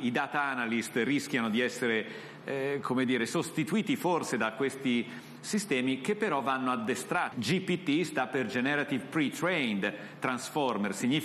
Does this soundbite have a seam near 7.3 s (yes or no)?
yes